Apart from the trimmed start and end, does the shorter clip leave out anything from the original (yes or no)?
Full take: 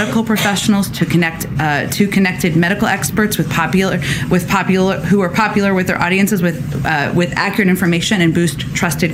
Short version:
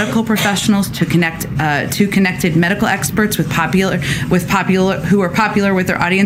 no